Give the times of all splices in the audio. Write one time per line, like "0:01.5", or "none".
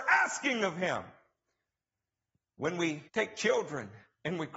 0:03.1